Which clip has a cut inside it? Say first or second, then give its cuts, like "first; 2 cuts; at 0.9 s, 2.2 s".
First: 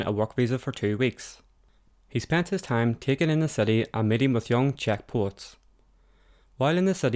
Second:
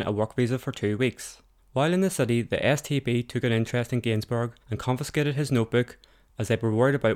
second; 2 cuts; at 1.6 s, 4.6 s